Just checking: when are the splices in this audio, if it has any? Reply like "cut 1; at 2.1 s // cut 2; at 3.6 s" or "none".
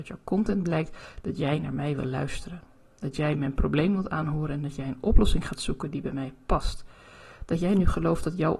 none